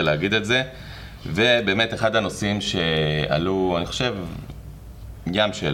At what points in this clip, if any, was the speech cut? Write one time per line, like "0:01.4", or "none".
none